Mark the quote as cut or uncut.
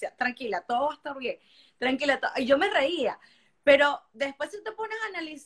uncut